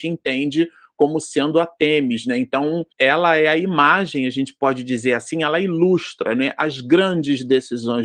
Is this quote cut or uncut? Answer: cut